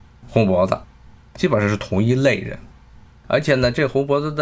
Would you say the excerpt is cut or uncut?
uncut